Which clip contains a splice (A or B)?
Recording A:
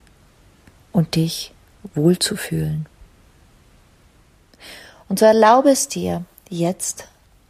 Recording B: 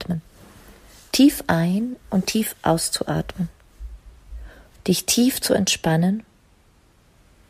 B